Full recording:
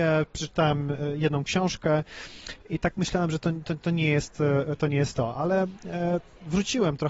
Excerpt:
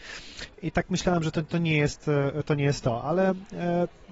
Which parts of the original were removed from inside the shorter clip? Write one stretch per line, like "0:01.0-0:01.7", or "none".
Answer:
0:03.4-0:03.6